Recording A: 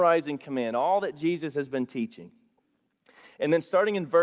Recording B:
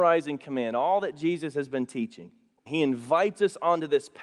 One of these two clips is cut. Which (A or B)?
B